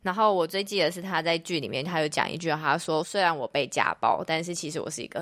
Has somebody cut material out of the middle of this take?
no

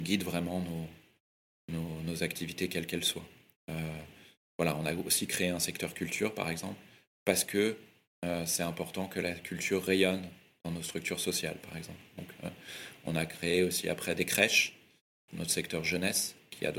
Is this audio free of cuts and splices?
no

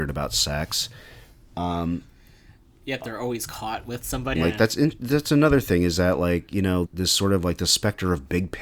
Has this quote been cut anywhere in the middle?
yes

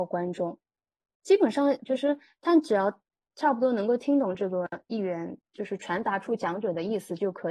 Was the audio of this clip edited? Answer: yes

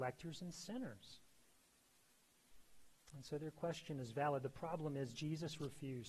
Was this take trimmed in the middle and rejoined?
no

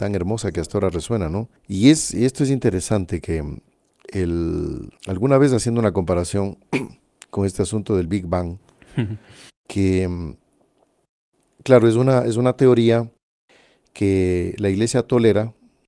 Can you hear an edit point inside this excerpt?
yes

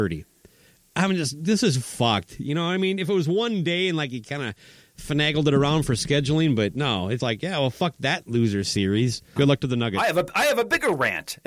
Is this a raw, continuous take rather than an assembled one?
no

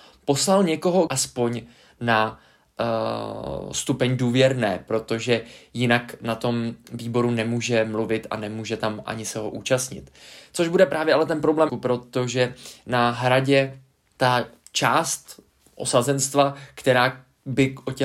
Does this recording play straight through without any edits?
no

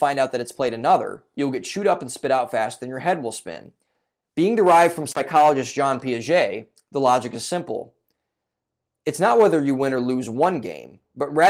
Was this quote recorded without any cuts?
no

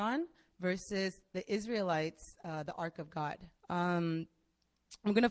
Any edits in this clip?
yes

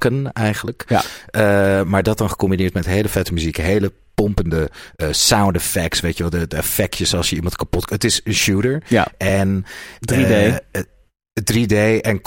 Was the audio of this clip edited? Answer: no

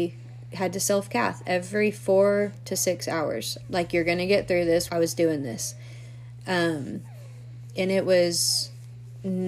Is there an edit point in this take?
yes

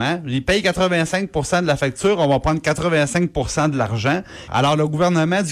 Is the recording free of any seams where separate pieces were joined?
no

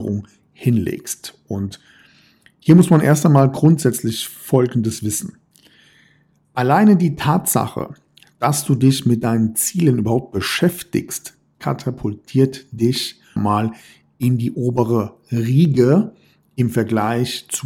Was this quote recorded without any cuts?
no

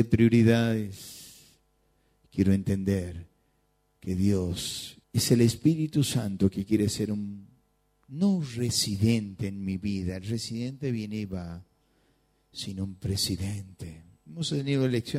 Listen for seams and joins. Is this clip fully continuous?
no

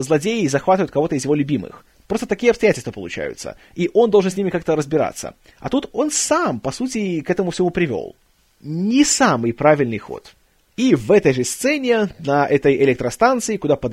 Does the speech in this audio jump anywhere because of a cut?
no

